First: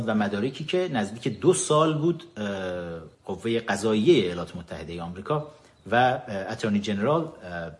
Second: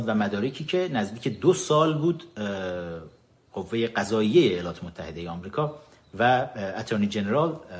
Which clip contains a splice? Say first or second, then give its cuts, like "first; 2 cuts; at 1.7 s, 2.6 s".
first; 1 cut; at 3.1 s